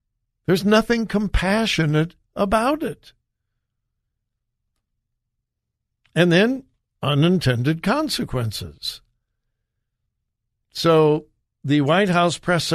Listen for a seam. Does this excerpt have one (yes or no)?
no